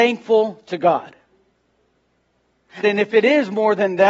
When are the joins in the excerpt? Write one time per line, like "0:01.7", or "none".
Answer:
0:02.8